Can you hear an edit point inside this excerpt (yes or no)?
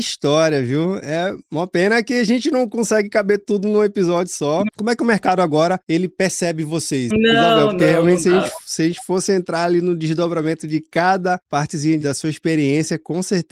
yes